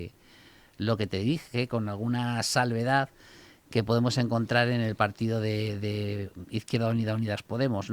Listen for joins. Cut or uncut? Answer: uncut